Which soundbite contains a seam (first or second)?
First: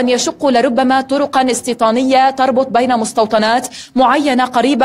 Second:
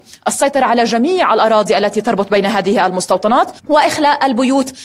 second